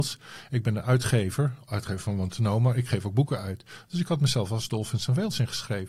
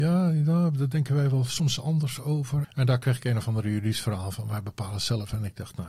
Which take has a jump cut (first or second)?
second